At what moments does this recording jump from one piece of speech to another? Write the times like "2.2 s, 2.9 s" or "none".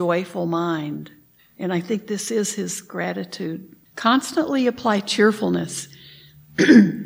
3.9 s